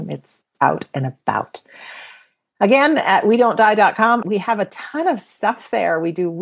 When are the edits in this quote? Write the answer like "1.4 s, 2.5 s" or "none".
4.2 s